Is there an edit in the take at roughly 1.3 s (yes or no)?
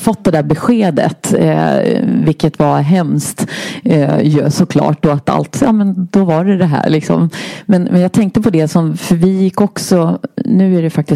no